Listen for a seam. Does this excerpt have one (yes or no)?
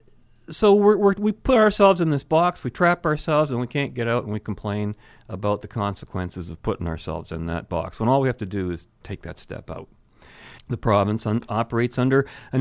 yes